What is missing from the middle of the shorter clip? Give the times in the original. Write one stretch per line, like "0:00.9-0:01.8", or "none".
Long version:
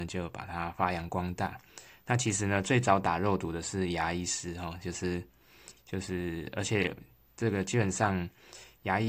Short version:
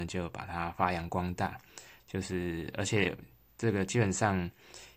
0:02.0-0:05.8